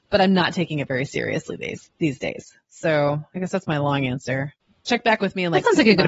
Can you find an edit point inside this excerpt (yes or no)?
no